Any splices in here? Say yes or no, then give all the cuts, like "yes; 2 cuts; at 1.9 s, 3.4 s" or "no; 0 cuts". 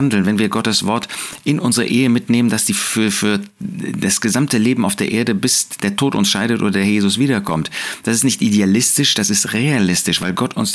no; 0 cuts